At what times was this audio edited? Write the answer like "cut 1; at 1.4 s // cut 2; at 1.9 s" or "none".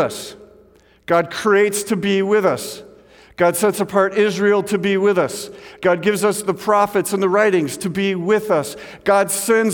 none